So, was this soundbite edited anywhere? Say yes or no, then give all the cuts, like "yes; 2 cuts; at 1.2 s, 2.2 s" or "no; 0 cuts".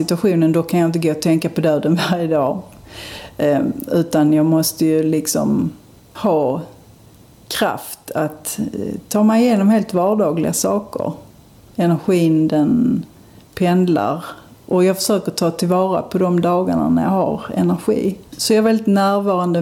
yes; 1 cut; at 18.3 s